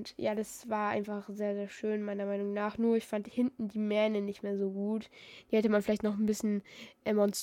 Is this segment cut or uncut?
uncut